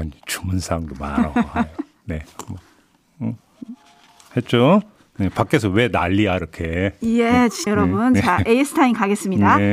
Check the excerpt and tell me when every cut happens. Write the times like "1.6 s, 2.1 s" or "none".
7.7 s